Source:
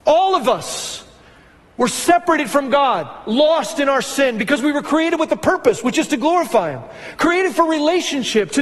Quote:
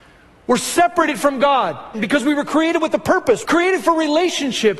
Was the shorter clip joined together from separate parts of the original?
yes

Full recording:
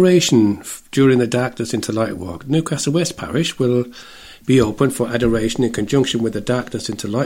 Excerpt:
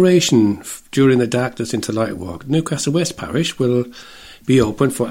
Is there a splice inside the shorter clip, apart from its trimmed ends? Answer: no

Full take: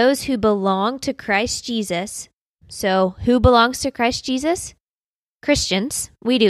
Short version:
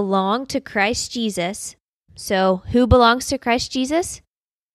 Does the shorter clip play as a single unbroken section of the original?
yes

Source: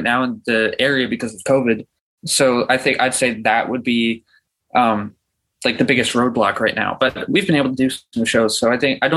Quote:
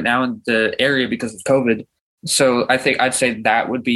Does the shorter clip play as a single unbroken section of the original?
yes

